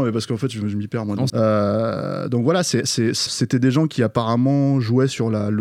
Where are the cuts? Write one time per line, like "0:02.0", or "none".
0:01.3
0:03.3